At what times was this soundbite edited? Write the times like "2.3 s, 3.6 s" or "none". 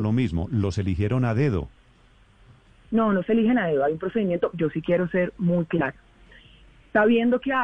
4.5 s